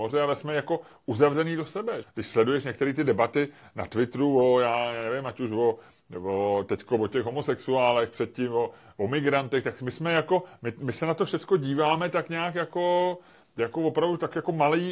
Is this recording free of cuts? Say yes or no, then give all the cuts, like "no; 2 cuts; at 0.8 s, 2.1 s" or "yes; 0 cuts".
no; 1 cut; at 2.0 s